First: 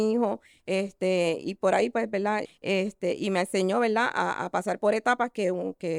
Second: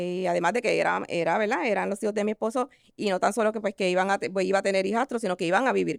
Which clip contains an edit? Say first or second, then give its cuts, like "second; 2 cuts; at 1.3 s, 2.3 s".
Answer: first; 1 cut; at 2.4 s